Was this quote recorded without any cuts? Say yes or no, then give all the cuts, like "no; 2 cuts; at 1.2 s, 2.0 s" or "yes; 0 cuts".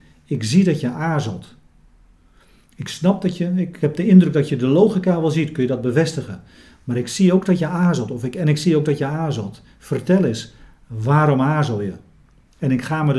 yes; 0 cuts